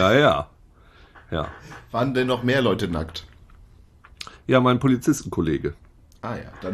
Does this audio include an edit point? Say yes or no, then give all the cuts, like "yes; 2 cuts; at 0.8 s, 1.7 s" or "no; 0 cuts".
no; 0 cuts